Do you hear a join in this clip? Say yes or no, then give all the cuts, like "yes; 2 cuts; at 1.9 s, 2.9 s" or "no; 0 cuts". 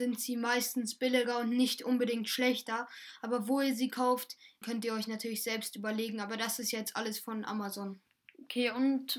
yes; 1 cut; at 4.6 s